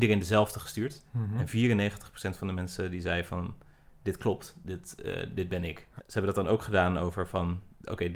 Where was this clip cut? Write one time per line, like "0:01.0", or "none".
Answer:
0:06.0